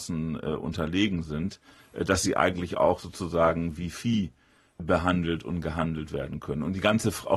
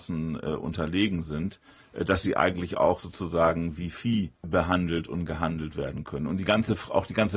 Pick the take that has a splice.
second; 1 cut; at 4.4 s

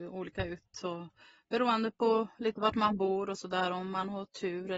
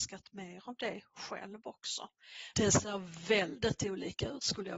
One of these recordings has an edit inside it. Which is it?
second; 1 cut; at 2.5 s

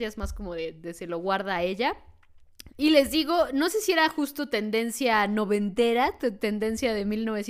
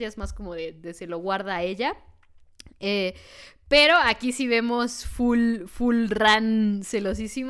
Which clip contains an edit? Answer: first; 1 cut; at 2.7 s

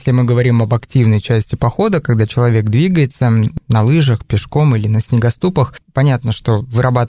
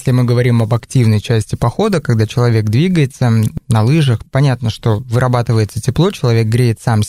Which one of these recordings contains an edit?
second; 1 cut; at 4.3 s

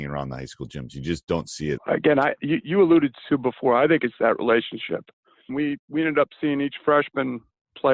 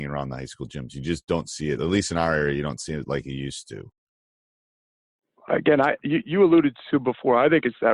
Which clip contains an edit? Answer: first; 2 cuts; at 1.8 s, 5.5 s

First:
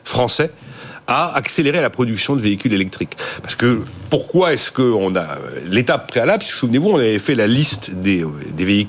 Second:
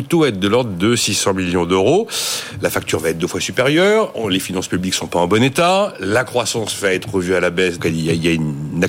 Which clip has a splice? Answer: second; 1 cut; at 7.8 s

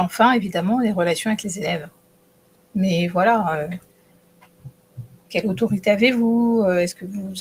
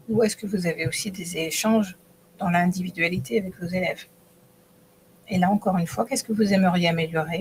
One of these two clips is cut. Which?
first; 1 cut; at 2.5 s

